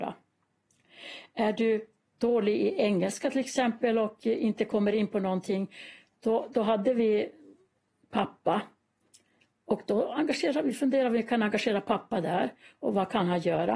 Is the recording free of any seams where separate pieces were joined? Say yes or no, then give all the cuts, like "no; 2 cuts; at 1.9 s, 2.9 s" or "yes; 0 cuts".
yes; 0 cuts